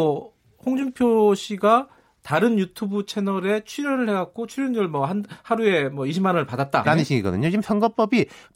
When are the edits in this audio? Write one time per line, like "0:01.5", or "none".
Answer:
0:06.8